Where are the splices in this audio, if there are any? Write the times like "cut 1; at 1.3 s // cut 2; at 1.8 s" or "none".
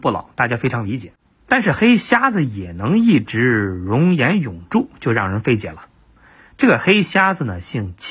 none